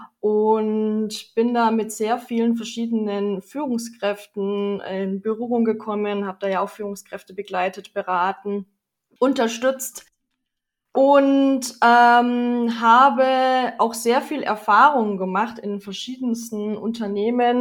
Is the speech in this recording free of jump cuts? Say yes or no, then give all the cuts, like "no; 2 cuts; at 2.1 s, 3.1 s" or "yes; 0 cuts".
yes; 0 cuts